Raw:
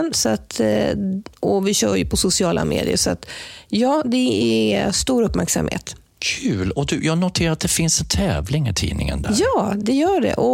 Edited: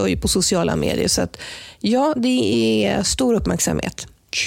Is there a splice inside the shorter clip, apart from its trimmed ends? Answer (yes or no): no